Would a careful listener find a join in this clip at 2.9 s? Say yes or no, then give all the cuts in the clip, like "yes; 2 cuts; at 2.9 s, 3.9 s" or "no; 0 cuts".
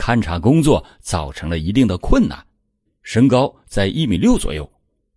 yes; 1 cut; at 2.9 s